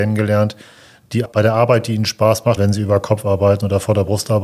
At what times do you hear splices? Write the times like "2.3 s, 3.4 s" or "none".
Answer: 1.3 s, 2.6 s